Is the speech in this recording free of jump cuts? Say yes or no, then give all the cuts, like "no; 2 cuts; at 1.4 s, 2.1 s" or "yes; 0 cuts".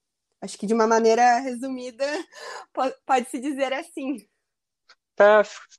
yes; 0 cuts